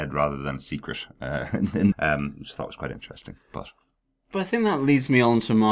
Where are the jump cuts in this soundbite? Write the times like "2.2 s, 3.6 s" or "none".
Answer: 1.9 s